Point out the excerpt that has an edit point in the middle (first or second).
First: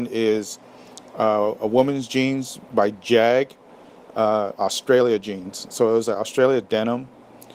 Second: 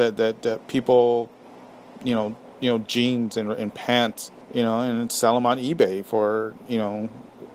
second